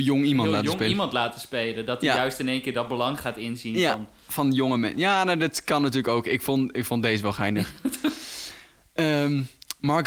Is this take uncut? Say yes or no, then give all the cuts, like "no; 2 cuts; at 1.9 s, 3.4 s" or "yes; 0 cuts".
yes; 0 cuts